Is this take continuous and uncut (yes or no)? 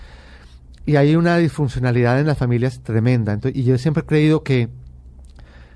yes